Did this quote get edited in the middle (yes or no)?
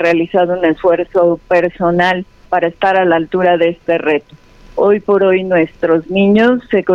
yes